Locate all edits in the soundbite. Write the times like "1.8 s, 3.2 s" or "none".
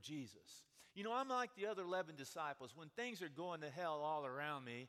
none